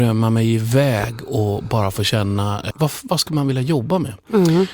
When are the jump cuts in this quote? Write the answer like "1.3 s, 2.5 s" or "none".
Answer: 2.7 s